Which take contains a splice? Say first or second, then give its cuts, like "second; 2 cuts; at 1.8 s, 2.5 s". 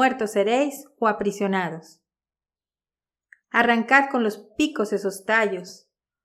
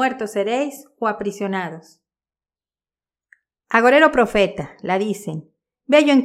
first; 1 cut; at 3.4 s